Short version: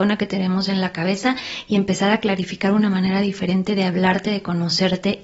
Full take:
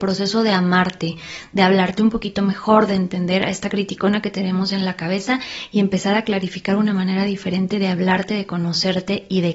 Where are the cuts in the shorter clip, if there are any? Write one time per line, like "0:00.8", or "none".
none